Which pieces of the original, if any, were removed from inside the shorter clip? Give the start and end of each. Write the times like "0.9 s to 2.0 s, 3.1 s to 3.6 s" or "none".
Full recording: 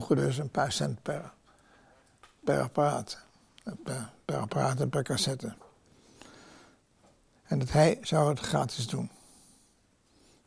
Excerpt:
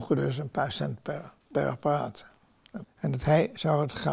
1.4 s to 2.3 s, 3.8 s to 7.3 s